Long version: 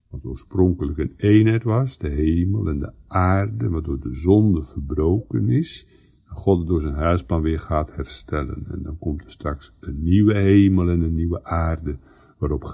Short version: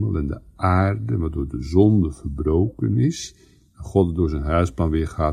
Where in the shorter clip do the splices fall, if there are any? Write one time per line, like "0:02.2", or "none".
none